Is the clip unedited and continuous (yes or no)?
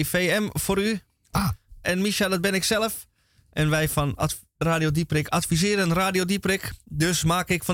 no